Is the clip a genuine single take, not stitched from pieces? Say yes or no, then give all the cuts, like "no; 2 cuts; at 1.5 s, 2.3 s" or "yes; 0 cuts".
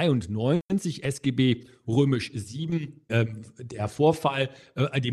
no; 1 cut; at 3.1 s